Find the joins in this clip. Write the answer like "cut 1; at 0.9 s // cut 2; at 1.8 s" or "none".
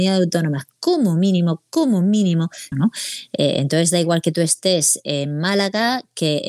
cut 1; at 2.7 s